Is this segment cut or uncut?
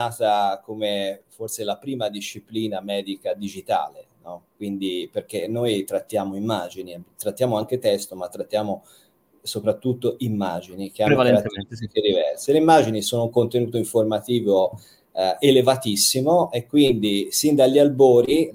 uncut